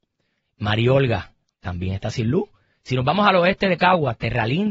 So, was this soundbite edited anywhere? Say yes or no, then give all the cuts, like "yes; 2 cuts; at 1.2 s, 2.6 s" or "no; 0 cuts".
no; 0 cuts